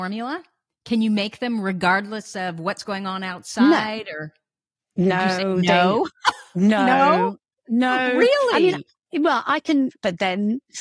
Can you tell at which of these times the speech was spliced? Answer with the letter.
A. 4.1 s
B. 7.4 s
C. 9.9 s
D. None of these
C